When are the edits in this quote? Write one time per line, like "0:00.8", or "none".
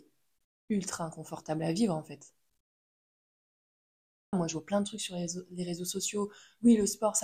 0:04.3